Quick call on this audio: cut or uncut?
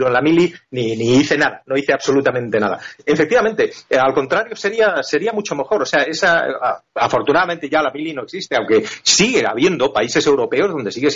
uncut